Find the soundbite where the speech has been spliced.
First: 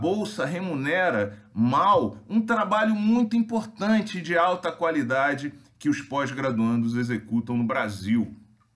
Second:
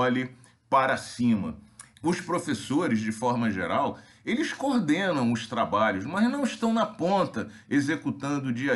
second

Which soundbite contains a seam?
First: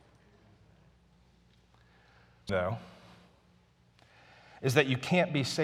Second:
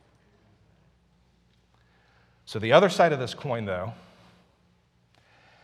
first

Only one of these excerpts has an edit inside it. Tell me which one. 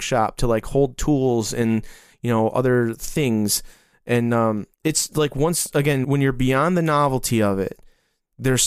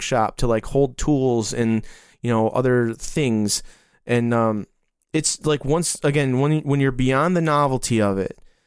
first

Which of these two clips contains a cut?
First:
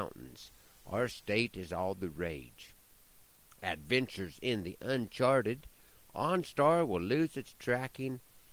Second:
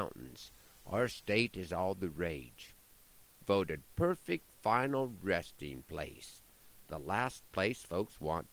second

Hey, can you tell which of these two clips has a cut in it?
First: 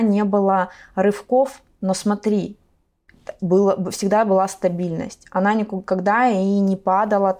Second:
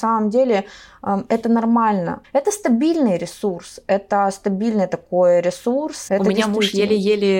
second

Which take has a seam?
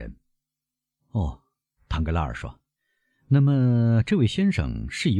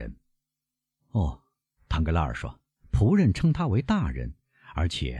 second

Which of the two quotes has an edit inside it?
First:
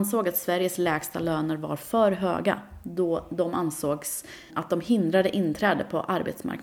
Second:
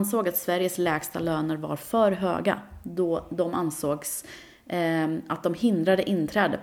first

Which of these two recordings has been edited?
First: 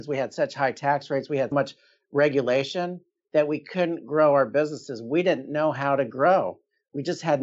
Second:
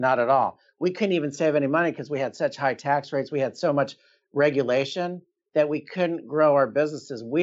first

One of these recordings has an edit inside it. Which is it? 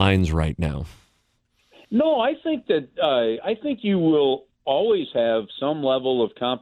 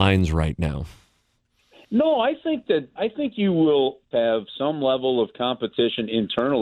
second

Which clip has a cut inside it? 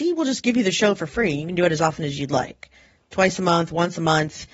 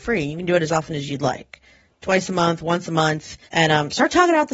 second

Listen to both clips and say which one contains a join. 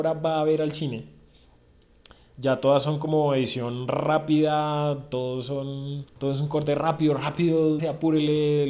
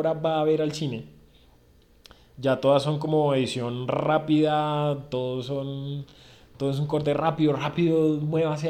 first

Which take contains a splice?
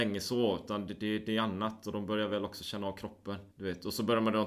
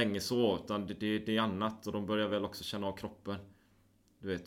first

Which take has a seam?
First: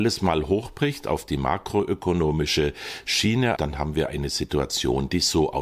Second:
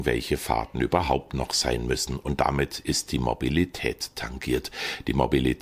first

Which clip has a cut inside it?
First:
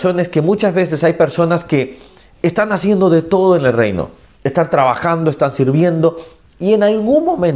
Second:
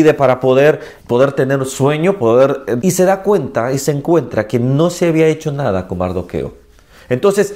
second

